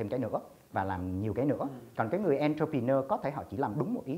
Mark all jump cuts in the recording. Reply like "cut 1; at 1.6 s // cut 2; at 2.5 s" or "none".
cut 1; at 1.9 s